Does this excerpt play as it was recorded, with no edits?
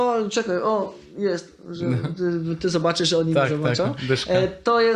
yes; 0 cuts

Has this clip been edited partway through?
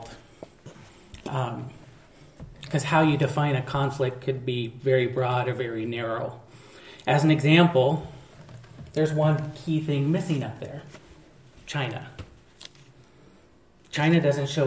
no; 0 cuts

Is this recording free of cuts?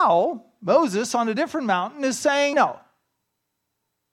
no; 1 cut; at 2.5 s

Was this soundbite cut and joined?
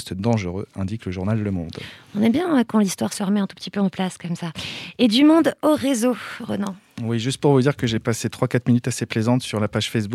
no; 0 cuts

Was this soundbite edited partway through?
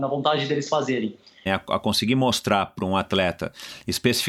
yes; 1 cut; at 1.5 s

